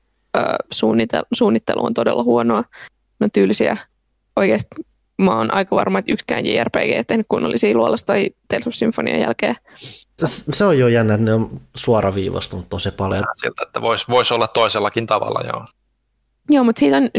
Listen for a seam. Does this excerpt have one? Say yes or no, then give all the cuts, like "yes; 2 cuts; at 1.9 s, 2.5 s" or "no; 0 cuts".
yes; 2 cuts; at 10.2 s, 13.2 s